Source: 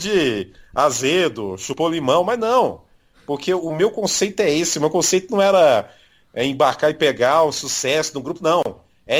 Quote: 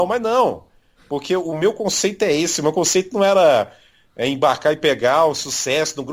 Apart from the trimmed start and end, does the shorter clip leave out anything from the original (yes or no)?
no